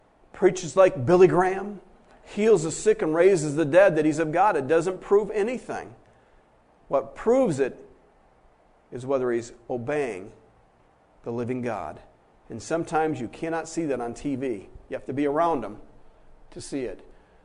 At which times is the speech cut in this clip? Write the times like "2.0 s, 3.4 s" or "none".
none